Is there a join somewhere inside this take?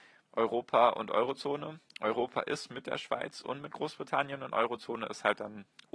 no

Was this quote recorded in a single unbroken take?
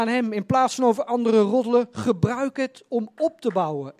yes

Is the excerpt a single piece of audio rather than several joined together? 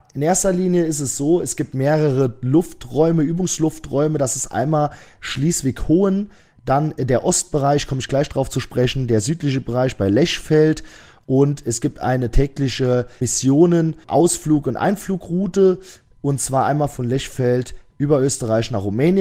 yes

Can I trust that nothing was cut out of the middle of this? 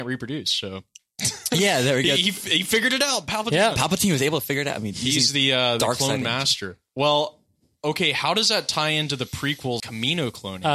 no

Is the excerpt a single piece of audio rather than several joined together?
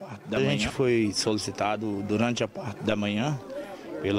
yes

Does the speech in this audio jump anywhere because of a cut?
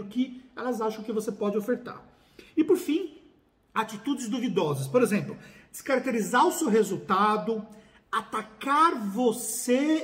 no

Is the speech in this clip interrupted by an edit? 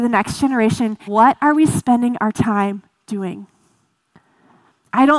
yes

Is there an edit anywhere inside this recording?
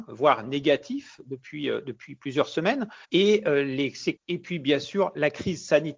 yes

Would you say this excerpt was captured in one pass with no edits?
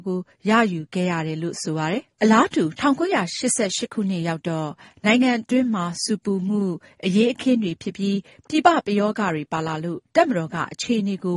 yes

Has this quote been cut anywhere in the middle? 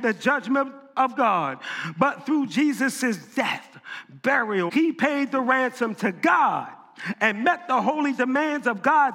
yes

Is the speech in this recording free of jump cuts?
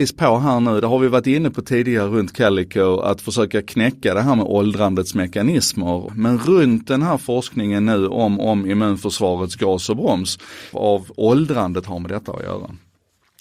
no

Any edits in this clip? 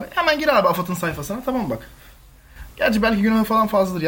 yes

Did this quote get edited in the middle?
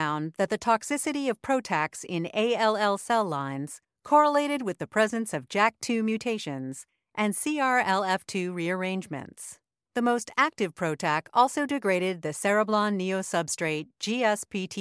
no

